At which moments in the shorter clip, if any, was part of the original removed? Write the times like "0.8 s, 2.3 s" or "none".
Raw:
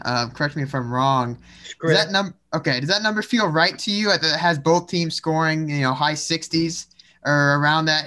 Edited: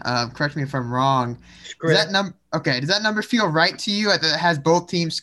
none